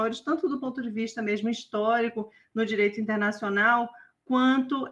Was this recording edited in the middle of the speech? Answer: no; 0 cuts

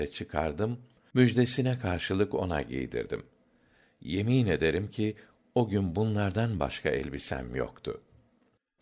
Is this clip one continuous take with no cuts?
yes; 0 cuts

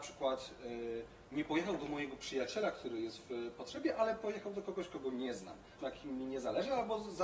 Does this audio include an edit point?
yes; 1 cut; at 5.8 s

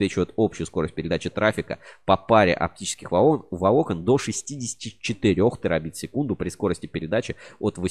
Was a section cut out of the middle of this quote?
no; 0 cuts

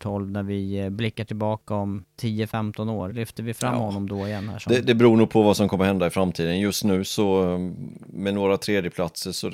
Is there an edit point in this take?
no; 0 cuts

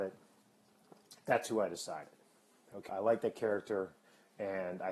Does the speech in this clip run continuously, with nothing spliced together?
no; 1 cut; at 2.9 s

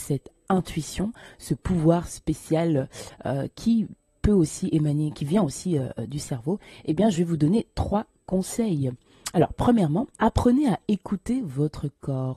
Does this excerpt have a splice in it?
yes; 1 cut; at 10.2 s

